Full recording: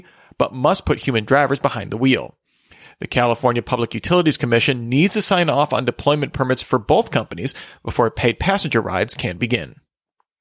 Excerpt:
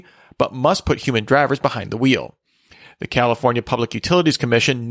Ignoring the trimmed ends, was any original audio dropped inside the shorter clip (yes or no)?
no